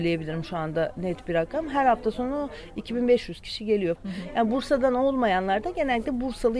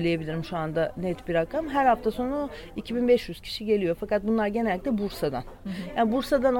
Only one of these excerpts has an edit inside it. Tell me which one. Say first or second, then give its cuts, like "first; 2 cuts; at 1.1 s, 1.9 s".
first; 1 cut; at 4.0 s